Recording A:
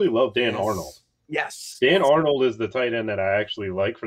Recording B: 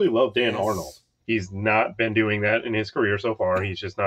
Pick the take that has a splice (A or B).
B